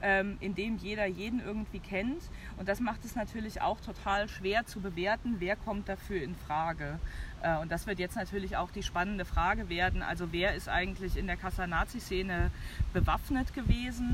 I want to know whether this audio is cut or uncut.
uncut